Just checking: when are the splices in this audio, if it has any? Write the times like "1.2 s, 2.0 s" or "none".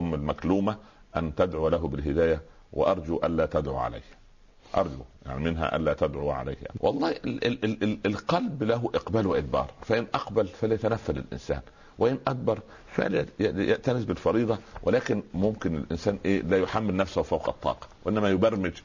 6.8 s